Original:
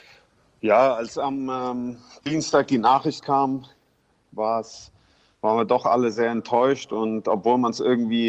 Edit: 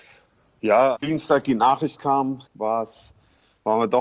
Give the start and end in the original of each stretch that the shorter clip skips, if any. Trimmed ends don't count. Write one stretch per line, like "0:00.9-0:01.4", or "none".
0:01.0-0:02.2
0:03.7-0:04.2